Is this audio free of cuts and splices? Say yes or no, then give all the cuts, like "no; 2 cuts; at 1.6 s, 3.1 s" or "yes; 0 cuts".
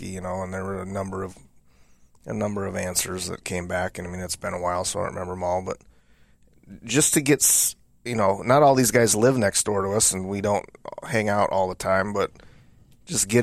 yes; 0 cuts